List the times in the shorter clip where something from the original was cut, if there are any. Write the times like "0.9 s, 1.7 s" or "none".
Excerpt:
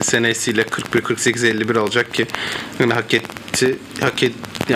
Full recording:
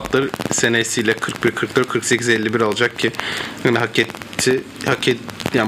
1.0 s